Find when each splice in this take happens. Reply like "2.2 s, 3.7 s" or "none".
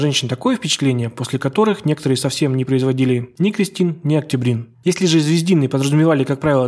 4.7 s